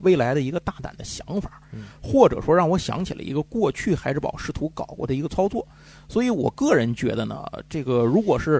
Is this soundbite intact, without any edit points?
yes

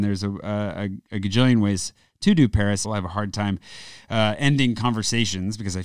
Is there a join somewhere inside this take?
yes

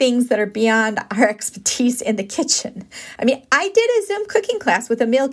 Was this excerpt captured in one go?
yes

